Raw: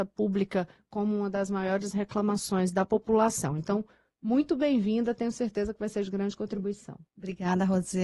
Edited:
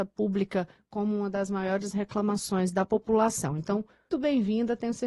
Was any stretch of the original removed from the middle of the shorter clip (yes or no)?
yes